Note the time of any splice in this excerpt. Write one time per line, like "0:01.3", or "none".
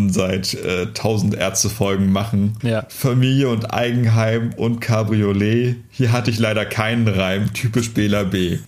none